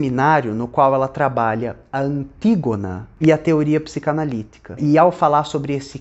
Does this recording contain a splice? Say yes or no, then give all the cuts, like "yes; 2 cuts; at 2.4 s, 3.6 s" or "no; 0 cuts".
no; 0 cuts